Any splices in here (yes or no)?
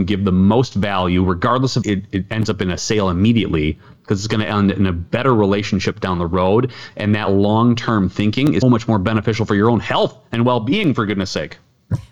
yes